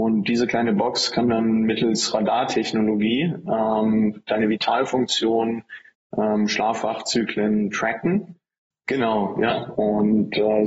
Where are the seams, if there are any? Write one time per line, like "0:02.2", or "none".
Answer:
0:05.9
0:08.7
0:09.7